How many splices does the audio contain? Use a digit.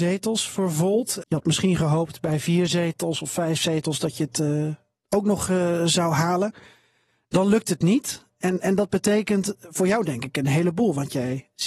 1